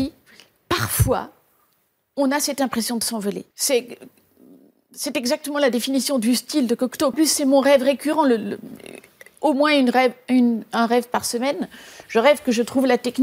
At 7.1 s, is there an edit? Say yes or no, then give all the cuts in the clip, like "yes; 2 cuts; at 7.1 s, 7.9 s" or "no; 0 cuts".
yes; 2 cuts; at 3.5 s, 7.1 s